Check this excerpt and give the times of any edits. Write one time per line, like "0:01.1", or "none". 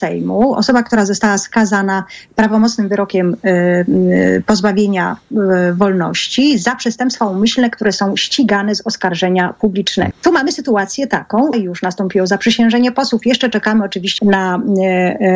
0:10.1
0:11.5
0:14.2